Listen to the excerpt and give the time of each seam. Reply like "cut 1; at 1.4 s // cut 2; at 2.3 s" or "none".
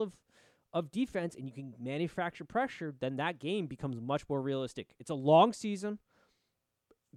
none